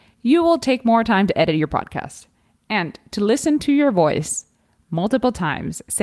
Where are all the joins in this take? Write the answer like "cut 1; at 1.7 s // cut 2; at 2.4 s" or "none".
none